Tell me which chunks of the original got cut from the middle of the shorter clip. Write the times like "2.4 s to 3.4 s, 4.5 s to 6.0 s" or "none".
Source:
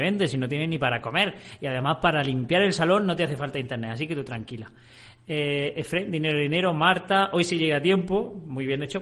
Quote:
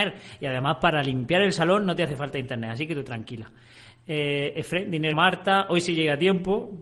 6.3 s to 6.8 s